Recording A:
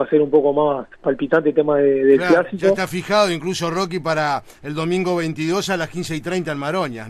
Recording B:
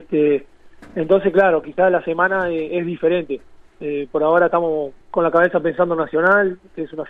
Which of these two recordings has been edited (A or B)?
B